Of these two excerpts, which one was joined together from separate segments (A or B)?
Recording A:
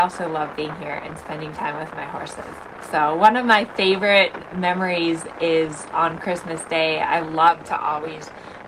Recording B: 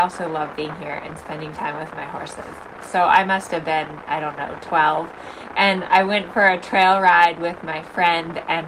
B